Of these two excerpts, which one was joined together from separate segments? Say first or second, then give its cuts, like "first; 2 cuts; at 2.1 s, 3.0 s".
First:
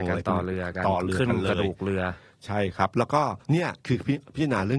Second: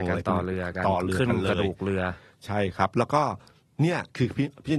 first; 1 cut; at 3.4 s